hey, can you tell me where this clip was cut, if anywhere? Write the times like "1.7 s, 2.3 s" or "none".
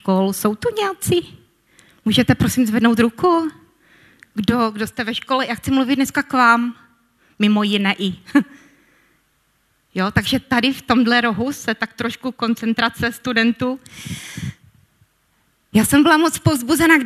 none